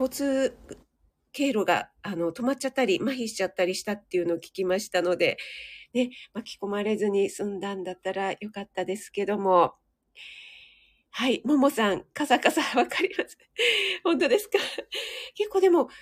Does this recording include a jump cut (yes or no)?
no